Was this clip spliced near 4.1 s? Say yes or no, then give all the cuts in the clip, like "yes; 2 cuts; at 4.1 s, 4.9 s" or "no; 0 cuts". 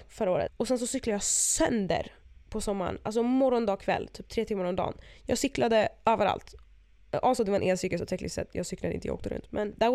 no; 0 cuts